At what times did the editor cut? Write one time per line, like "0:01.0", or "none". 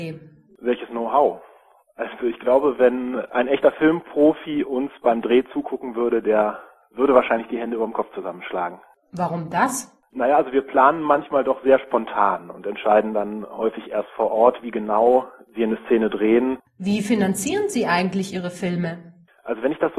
0:16.6